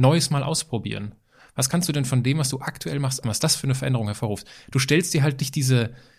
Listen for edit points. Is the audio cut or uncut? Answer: cut